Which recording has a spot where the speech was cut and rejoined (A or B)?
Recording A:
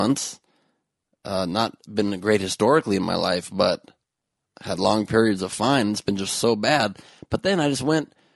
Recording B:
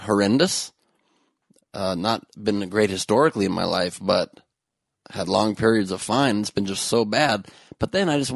B